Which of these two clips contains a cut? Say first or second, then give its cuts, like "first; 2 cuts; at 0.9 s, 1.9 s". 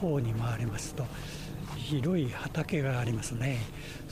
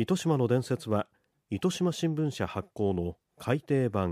first; 1 cut; at 1.8 s